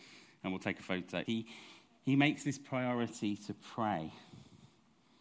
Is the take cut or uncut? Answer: cut